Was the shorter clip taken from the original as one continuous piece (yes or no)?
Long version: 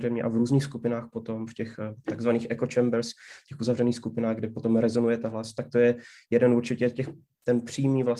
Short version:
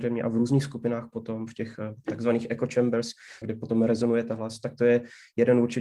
no